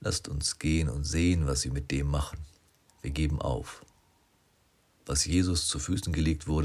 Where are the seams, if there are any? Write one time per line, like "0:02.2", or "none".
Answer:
0:02.9